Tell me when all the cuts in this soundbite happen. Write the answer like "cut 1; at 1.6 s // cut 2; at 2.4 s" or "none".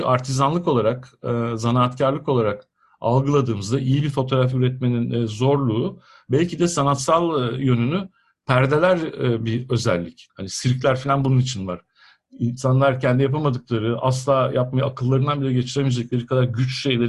cut 1; at 10.3 s

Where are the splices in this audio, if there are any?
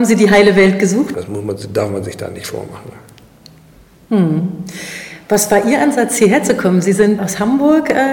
cut 1; at 1.1 s // cut 2; at 7.2 s

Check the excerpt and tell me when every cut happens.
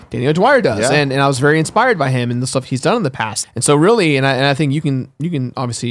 cut 1; at 3.4 s

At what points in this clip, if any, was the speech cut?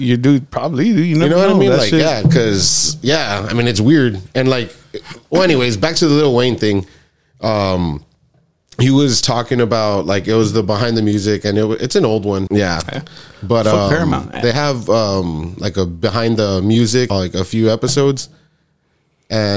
cut 1; at 12.5 s // cut 2; at 17.1 s

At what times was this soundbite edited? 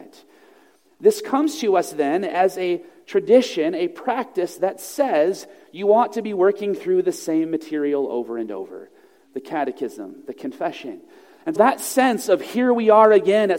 cut 1; at 11.6 s

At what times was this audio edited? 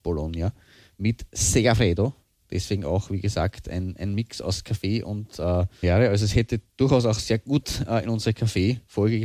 cut 1; at 5.8 s

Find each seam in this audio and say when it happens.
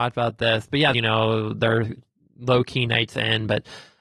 cut 1; at 0.9 s

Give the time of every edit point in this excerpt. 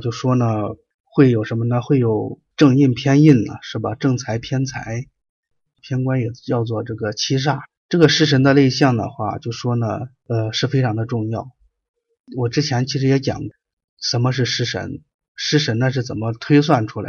cut 1; at 5.7 s

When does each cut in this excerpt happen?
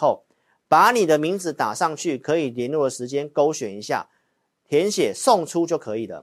none

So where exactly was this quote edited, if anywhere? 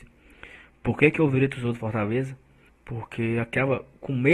cut 1; at 2.7 s

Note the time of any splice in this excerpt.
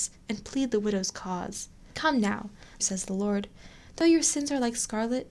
cut 1; at 2.8 s

